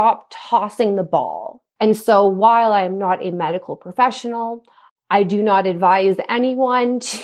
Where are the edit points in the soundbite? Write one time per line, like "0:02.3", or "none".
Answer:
0:01.8
0:04.9